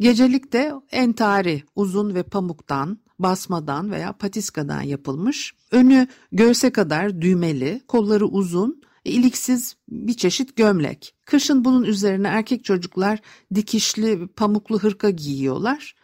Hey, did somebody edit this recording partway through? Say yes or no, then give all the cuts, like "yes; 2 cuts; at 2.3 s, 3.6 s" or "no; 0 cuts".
no; 0 cuts